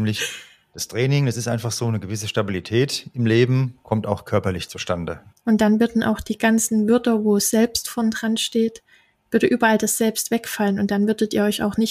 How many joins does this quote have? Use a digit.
1